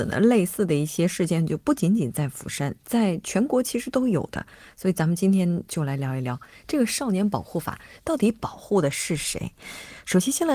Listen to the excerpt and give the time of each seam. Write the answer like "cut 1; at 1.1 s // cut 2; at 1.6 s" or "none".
none